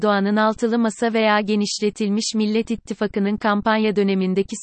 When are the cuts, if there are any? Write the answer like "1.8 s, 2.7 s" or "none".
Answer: none